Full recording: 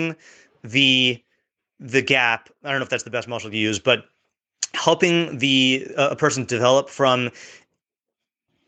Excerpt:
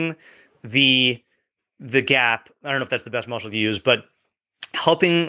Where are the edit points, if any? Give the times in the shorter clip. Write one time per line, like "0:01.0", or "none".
none